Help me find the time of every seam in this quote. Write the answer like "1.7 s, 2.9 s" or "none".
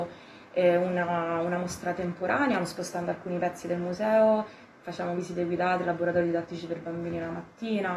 none